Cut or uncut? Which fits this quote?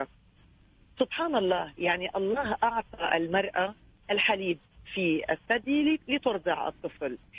uncut